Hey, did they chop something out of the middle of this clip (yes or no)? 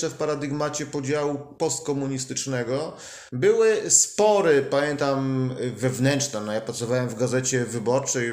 yes